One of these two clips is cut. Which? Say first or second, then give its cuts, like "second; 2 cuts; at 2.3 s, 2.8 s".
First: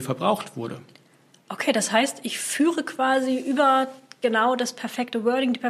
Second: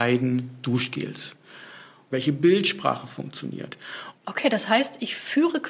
second; 2 cuts; at 2.1 s, 4.1 s